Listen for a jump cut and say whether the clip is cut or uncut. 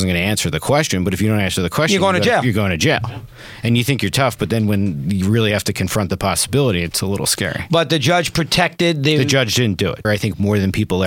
cut